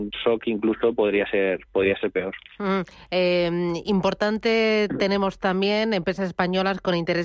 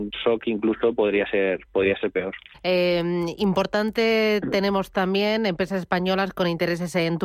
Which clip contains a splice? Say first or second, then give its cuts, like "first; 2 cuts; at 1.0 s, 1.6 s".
second; 1 cut; at 2.5 s